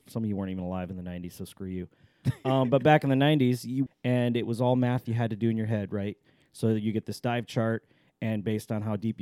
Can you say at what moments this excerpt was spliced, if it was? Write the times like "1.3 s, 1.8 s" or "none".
3.9 s